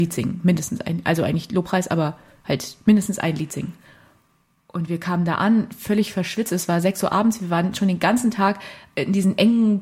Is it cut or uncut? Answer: uncut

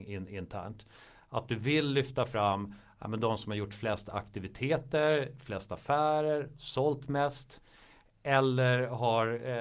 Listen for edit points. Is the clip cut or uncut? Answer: uncut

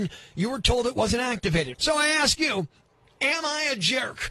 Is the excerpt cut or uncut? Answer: cut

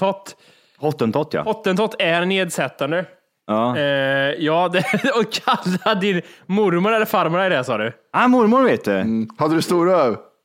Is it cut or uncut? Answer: uncut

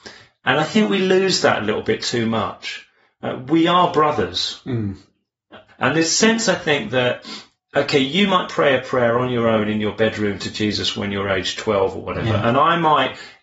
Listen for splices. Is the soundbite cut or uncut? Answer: cut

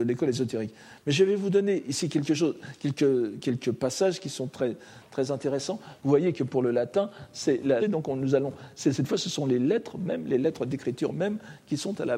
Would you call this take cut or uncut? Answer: cut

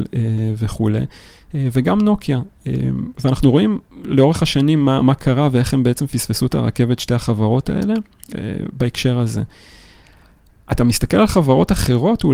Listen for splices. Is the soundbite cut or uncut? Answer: uncut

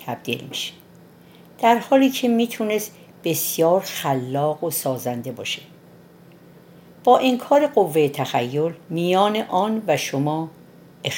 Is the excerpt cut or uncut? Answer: cut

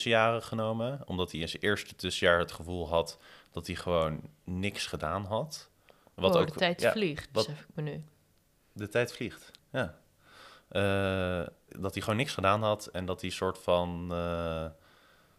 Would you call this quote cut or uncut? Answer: cut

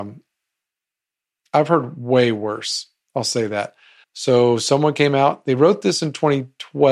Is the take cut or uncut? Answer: cut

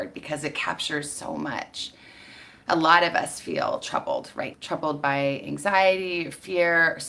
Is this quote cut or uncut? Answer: cut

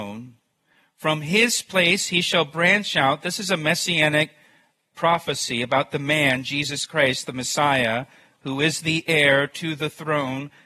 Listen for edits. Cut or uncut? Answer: uncut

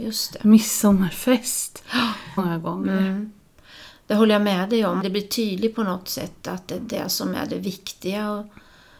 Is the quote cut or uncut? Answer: cut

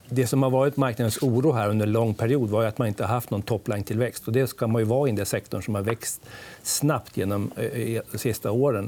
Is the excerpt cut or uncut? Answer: uncut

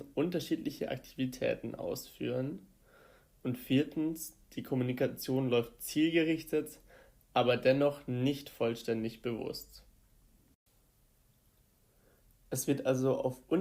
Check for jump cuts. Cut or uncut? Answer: uncut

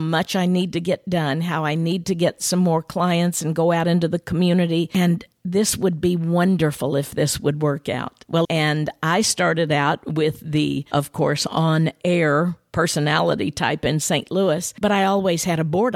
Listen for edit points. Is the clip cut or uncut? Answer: cut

